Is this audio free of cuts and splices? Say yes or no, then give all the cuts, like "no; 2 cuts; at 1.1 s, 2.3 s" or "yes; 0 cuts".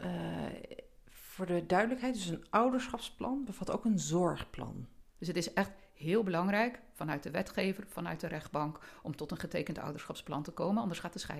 no; 1 cut; at 5.2 s